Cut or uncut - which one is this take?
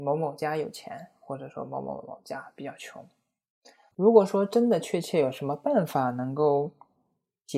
cut